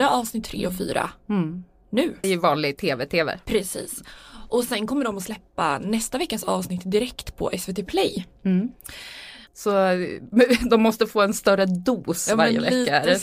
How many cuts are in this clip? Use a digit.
2